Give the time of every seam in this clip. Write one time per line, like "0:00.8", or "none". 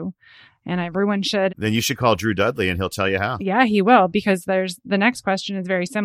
0:01.5